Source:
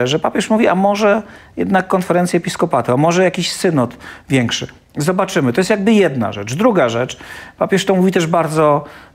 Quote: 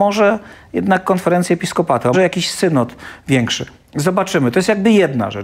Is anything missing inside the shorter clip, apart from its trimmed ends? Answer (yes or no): yes